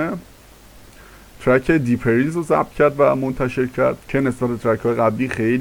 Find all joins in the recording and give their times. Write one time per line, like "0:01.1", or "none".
0:04.0